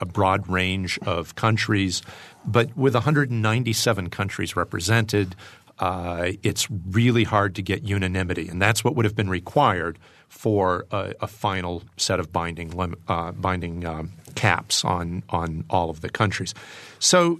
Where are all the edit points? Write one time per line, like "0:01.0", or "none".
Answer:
none